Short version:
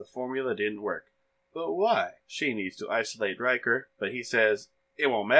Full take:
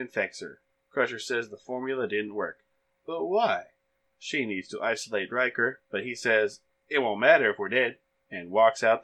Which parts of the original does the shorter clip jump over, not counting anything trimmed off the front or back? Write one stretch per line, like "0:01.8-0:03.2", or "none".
0:03.7-0:04.1